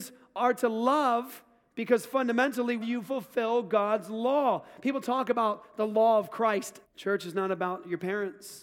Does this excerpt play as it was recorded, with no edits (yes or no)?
no